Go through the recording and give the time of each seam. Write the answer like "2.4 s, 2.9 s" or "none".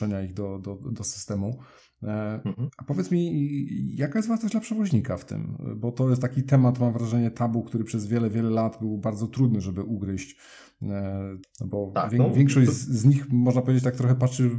11.4 s